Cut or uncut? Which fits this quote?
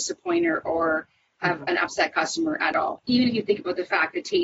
cut